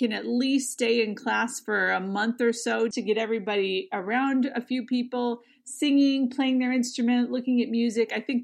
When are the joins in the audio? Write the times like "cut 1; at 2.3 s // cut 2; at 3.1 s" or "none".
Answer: cut 1; at 2.9 s